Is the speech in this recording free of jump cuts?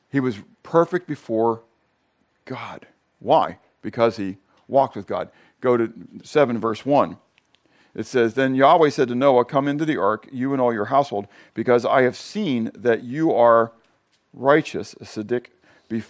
yes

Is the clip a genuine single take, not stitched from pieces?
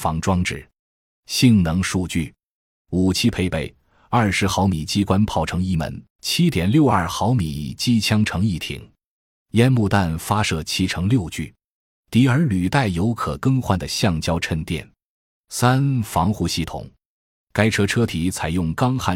no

